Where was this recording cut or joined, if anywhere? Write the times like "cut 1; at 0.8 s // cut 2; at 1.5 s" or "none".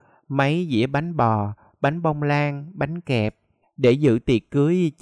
cut 1; at 3.6 s